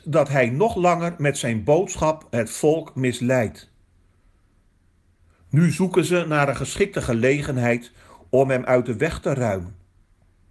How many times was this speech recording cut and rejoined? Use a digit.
0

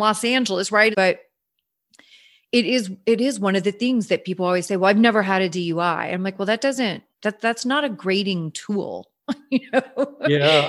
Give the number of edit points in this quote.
2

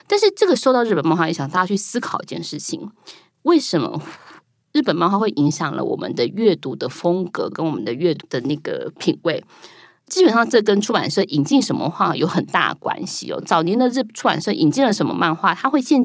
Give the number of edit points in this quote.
1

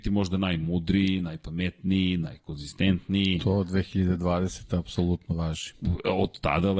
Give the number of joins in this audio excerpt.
0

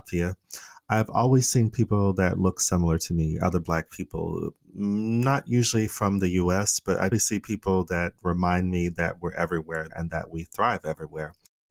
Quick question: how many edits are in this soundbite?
2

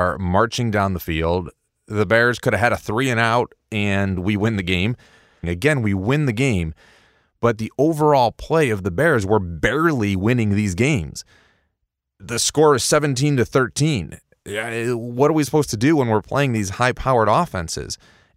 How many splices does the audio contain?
1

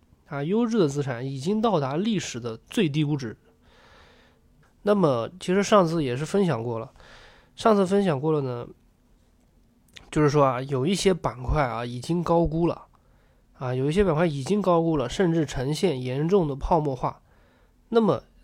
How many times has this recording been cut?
1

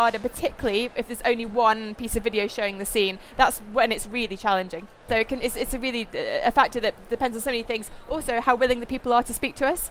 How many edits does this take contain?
1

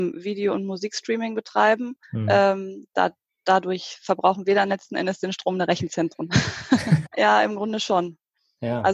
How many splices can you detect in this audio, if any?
2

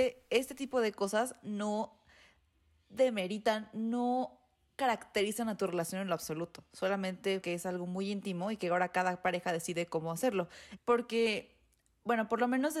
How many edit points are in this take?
2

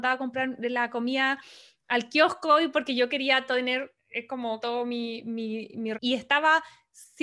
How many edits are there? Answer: 2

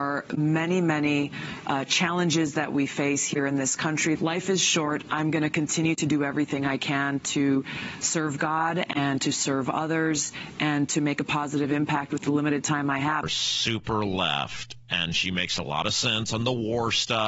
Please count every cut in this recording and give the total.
2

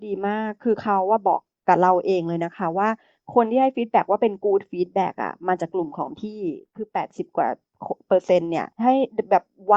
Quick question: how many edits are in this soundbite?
1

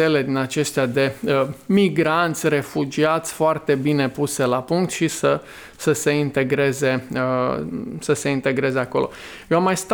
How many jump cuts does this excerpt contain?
0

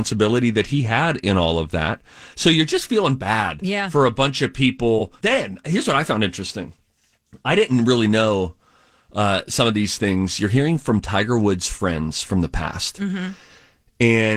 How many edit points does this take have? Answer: 1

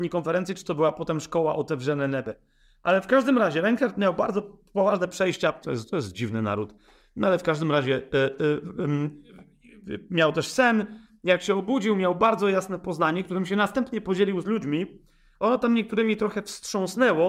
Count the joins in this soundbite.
1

